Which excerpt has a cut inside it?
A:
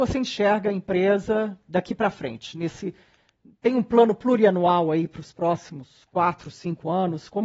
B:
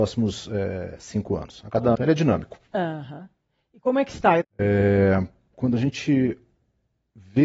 B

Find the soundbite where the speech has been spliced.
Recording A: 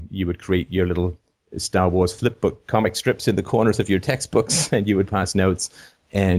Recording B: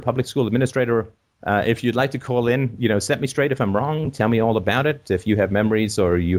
B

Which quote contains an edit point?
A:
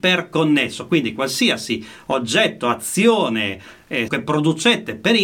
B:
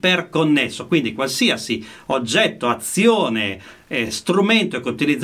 A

